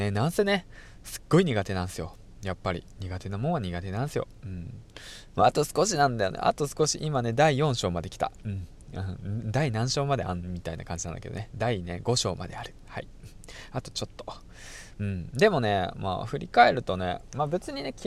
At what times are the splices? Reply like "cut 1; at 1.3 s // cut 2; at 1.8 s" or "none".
cut 1; at 5.3 s